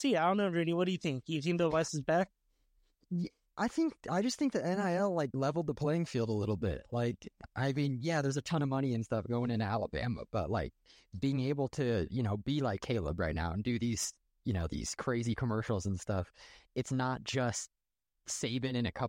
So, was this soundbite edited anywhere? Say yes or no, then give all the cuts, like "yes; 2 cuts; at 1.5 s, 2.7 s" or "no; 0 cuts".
no; 0 cuts